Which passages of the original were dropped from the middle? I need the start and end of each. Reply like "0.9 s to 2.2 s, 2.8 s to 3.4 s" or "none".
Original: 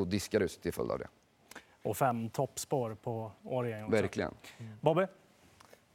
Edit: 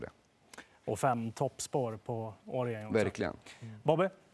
none